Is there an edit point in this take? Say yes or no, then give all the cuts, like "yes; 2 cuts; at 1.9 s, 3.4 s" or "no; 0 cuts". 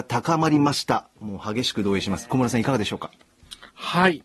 no; 0 cuts